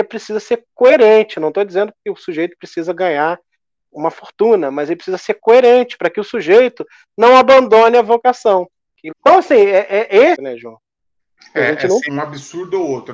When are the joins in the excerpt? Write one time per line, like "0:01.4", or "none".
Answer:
0:09.1
0:10.3
0:12.1